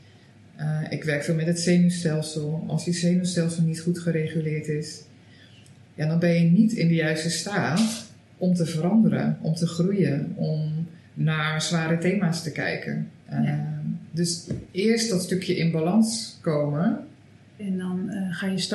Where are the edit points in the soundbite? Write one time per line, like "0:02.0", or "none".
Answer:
0:13.2
0:17.6